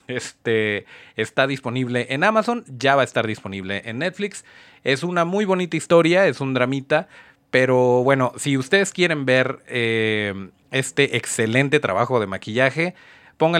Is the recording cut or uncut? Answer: uncut